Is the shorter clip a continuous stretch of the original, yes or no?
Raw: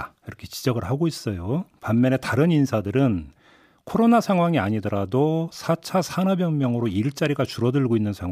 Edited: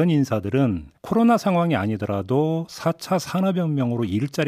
no